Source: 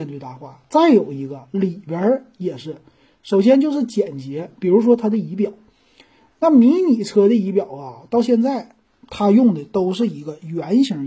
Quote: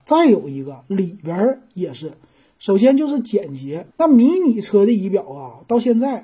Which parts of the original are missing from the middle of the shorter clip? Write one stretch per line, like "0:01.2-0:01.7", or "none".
0:04.5-0:06.3